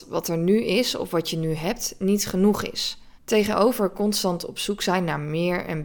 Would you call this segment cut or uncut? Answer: cut